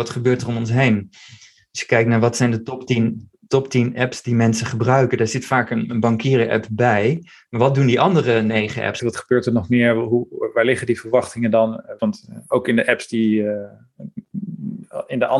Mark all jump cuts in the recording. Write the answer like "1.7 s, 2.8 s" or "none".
9.0 s, 12.0 s